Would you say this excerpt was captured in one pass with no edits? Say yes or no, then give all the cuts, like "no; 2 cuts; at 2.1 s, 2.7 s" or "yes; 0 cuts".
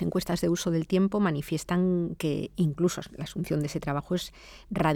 yes; 0 cuts